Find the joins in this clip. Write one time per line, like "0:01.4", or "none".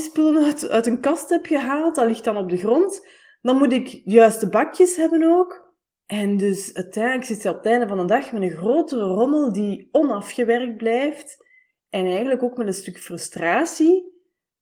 0:05.9